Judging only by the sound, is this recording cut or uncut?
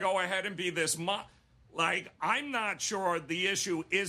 uncut